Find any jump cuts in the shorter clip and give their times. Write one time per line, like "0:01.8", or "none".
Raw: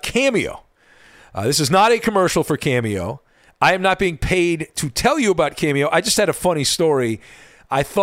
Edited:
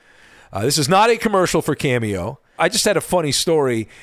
0:02.6

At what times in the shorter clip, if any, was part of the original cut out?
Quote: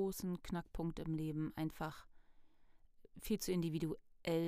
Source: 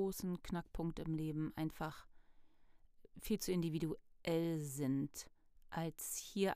none

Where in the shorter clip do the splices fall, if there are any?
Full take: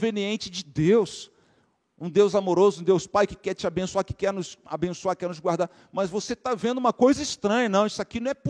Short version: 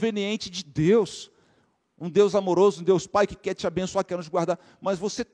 0:04.1

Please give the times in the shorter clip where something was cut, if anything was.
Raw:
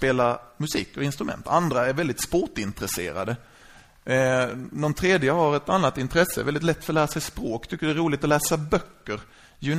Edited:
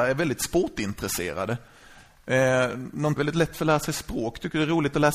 0:03.2

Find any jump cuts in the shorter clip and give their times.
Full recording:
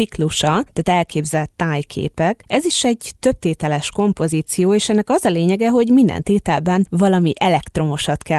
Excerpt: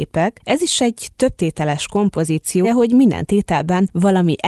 0:02.6

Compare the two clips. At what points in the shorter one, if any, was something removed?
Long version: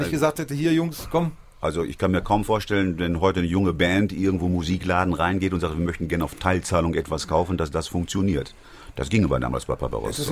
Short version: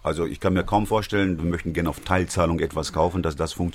0:01.4

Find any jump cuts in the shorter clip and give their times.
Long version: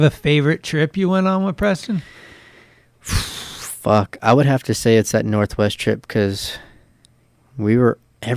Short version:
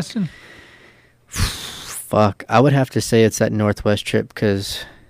none

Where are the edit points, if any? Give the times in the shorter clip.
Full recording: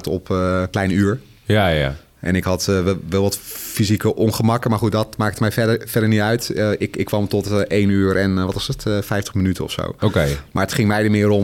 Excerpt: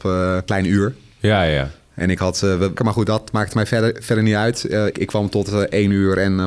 0:02.8
0:04.9

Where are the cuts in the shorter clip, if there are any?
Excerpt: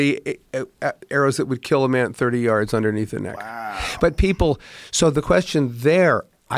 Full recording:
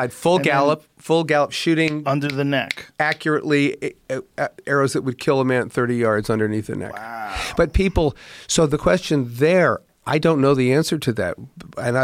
none

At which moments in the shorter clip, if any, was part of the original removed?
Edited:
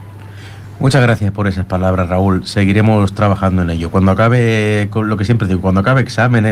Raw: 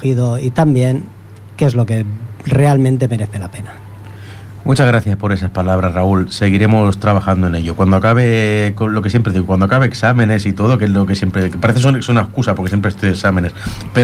none

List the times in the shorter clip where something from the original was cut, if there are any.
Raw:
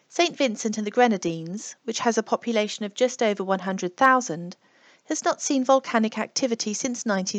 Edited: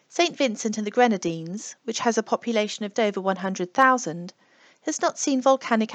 0:02.9

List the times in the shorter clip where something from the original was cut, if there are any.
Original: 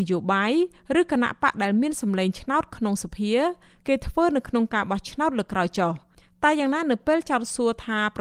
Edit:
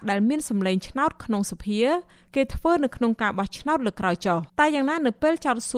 0:04.5

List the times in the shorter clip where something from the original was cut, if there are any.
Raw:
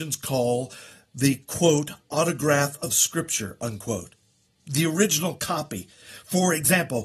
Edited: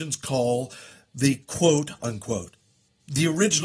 0:02.0

